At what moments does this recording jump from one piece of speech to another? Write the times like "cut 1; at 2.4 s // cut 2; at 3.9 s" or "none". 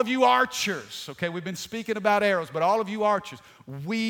none